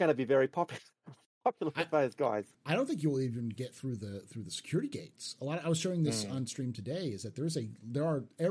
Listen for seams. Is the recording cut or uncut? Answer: cut